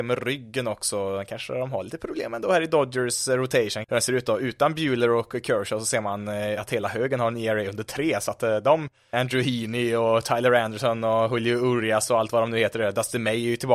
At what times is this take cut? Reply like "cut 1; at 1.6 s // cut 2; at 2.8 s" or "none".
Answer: cut 1; at 3.8 s // cut 2; at 9.1 s